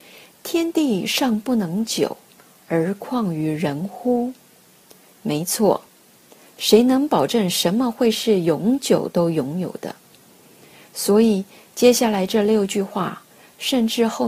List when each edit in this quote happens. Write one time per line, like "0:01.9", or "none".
none